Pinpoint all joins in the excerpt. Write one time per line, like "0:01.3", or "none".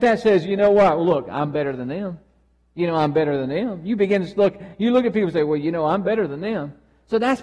none